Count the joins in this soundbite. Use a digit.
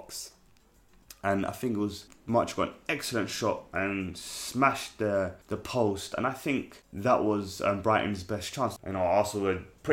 2